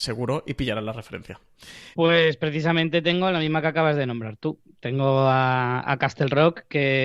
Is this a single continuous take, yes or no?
no